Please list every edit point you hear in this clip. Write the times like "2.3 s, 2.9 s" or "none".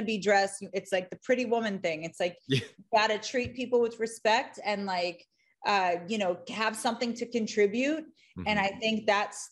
none